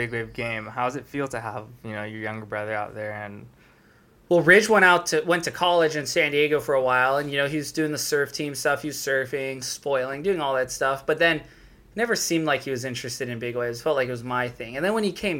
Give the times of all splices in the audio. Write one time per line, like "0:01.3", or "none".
none